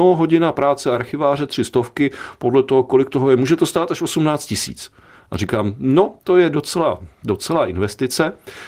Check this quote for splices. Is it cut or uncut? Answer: uncut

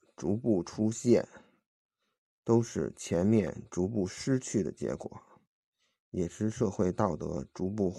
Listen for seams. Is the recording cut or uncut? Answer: uncut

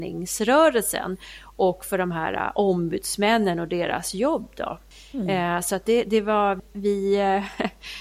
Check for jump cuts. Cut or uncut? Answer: uncut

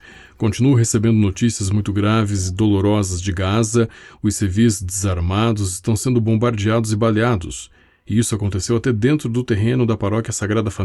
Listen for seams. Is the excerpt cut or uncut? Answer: uncut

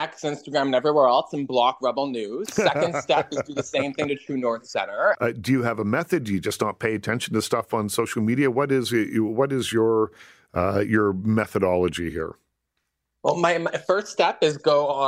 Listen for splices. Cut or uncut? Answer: cut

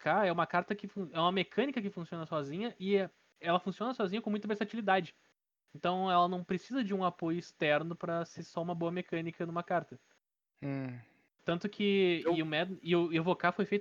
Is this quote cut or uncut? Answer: uncut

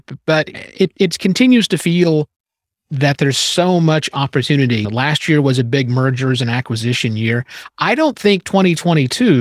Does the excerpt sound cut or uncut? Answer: uncut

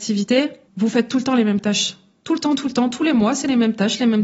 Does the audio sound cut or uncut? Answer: uncut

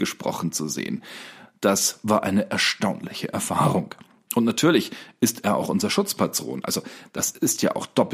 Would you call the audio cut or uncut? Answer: uncut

